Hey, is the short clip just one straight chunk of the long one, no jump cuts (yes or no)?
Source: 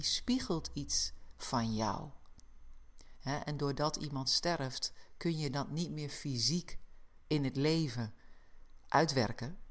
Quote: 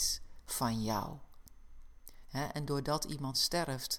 yes